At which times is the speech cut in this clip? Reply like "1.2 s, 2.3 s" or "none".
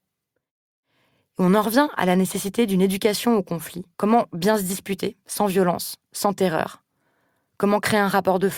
3.9 s